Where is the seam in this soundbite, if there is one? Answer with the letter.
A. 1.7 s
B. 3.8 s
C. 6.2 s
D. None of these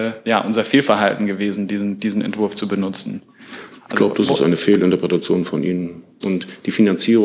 C